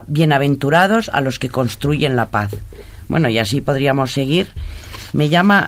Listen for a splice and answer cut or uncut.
cut